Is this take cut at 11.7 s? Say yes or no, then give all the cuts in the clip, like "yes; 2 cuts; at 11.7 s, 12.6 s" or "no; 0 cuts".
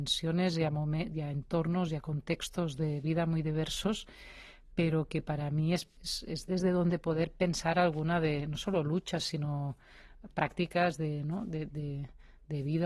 no; 0 cuts